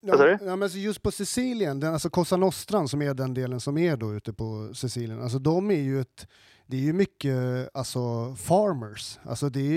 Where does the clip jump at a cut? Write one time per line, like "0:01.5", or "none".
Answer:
none